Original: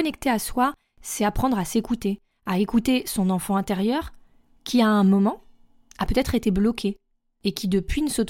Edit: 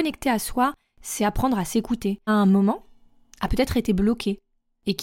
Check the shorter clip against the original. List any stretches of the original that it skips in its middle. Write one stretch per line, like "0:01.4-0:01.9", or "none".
0:02.3-0:04.8